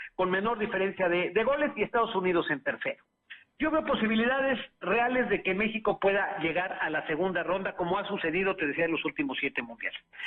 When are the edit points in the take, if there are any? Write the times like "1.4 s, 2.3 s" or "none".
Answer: 3.5 s